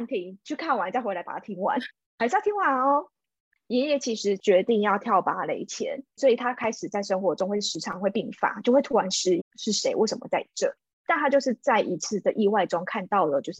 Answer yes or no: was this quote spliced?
yes